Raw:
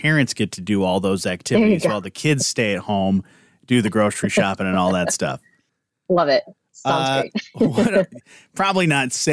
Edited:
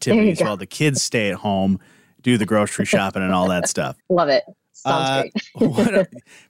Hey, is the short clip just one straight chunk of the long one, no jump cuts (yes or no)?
no